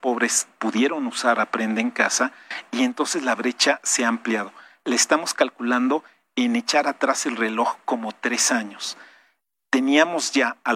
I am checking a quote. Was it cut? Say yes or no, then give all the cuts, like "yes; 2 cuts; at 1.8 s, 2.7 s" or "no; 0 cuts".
no; 0 cuts